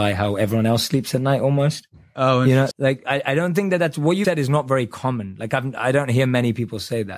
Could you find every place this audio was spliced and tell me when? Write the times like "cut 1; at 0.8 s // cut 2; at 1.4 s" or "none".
cut 1; at 2.7 s // cut 2; at 4.2 s